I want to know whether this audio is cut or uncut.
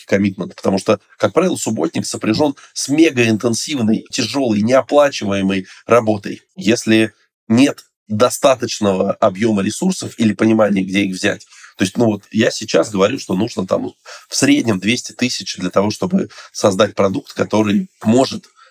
cut